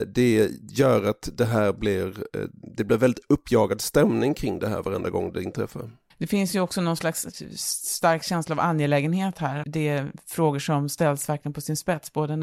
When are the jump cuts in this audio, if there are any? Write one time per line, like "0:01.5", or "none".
0:06.1
0:09.6